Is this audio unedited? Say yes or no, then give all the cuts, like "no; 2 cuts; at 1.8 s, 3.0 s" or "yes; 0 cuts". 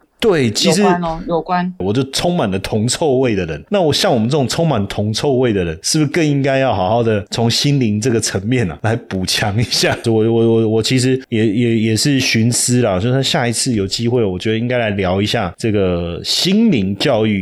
no; 2 cuts; at 1.8 s, 10.0 s